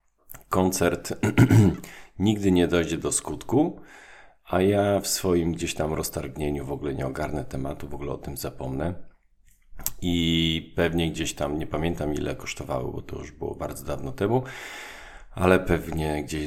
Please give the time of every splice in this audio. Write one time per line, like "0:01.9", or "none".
none